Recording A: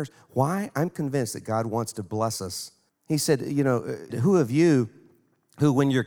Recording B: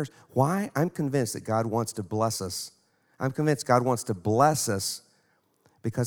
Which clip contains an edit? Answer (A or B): A